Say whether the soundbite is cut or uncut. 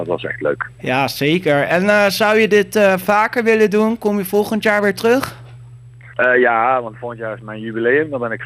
uncut